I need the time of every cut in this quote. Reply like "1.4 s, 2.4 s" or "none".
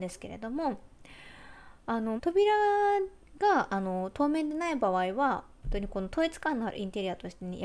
2.2 s